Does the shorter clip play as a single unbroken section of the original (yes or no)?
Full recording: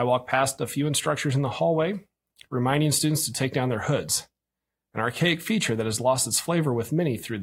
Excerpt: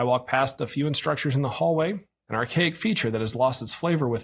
no